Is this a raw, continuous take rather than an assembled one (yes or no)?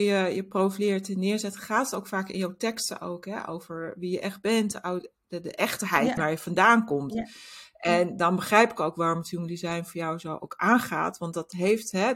no